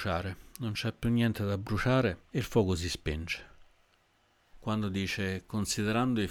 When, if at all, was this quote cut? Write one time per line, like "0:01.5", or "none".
0:02.3
0:04.5